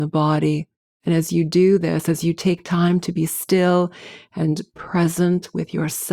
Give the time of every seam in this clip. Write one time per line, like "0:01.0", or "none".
0:00.9